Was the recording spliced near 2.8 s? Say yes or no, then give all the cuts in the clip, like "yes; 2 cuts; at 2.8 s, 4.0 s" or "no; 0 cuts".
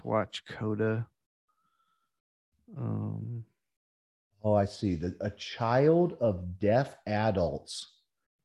no; 0 cuts